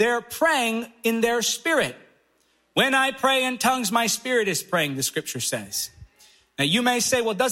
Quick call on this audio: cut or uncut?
uncut